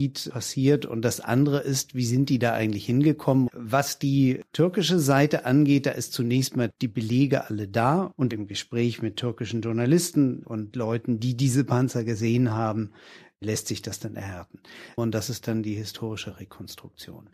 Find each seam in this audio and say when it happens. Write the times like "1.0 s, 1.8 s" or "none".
3.5 s, 15.0 s